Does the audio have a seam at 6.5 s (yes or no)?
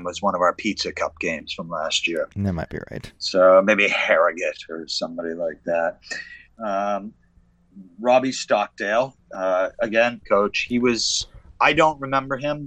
yes